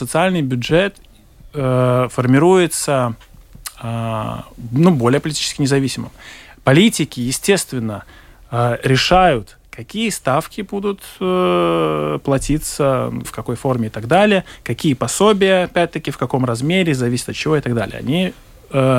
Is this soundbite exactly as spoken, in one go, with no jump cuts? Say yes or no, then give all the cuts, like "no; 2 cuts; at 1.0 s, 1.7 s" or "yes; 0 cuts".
no; 1 cut; at 13.2 s